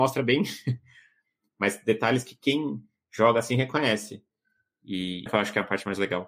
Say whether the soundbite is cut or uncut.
cut